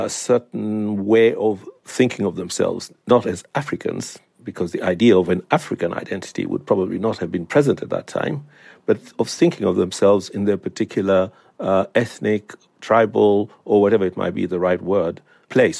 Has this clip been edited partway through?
no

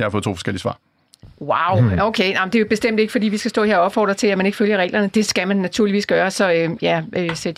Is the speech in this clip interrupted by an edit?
no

